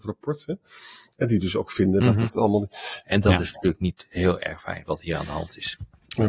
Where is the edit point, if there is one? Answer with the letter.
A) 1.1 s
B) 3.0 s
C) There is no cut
B